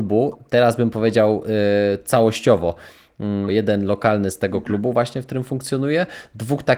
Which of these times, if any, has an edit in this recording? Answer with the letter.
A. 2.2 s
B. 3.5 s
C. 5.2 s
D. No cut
B